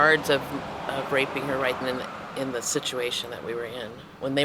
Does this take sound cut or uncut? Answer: cut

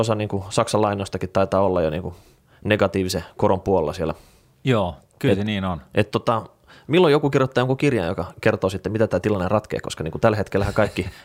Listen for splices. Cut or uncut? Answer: uncut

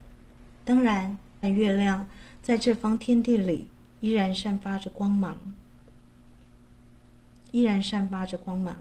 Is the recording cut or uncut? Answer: cut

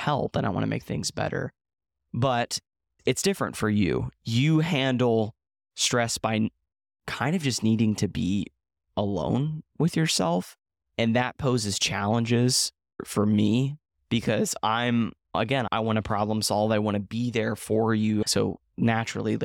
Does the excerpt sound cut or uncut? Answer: cut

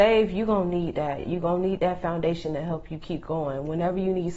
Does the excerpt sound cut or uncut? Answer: uncut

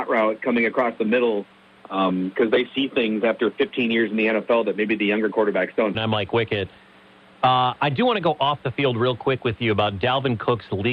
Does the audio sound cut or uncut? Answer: cut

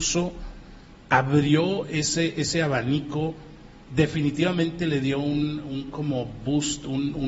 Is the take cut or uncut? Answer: uncut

